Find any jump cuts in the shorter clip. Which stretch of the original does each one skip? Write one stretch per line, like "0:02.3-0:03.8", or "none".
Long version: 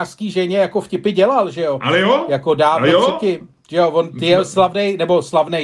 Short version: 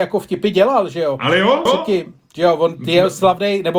0:02.3-0:03.0